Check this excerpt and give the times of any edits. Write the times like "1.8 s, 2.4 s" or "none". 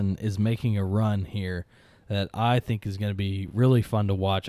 none